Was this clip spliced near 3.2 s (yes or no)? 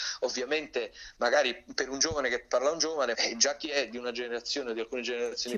yes